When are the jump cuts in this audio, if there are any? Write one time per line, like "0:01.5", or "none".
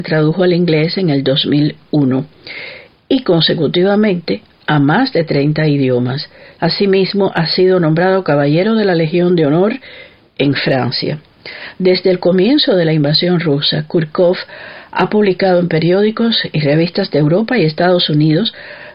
0:06.6